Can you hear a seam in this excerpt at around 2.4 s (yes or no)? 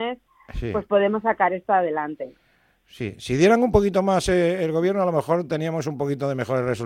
no